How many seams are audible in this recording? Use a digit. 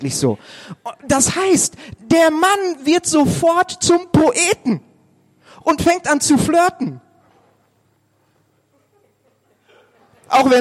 0